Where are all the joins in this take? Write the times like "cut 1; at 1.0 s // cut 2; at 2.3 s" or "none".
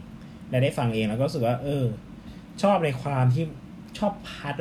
none